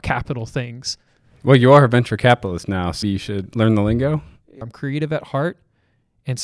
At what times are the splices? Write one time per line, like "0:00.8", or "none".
0:03.0
0:04.6